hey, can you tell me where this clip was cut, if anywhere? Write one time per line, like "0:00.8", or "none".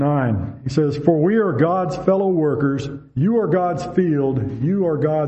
none